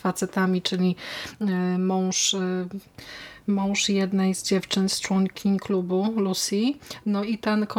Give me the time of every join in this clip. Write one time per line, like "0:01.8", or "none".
0:04.3